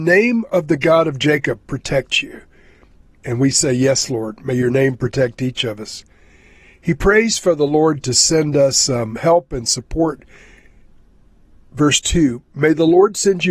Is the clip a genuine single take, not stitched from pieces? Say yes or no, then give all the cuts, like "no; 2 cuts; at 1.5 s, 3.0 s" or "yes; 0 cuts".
yes; 0 cuts